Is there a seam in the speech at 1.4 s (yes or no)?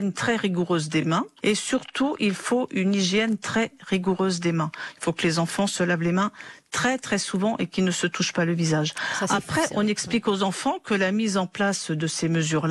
yes